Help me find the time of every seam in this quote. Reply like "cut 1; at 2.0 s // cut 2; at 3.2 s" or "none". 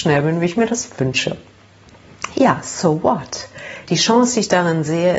cut 1; at 3.9 s